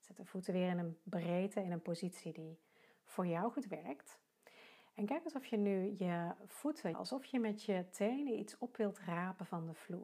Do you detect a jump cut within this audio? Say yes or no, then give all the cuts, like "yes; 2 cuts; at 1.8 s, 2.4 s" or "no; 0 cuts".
yes; 1 cut; at 6.9 s